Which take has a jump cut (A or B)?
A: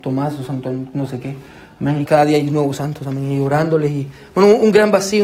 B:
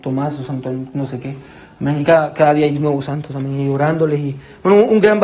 A